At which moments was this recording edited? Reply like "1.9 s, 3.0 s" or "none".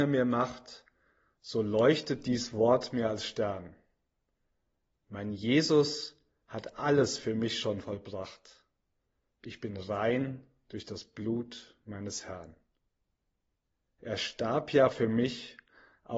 14.0 s